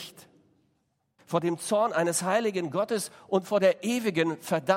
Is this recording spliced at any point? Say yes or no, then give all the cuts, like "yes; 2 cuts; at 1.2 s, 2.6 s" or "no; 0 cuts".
yes; 1 cut; at 1.2 s